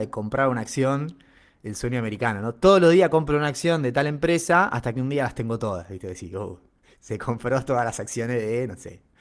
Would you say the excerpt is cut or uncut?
uncut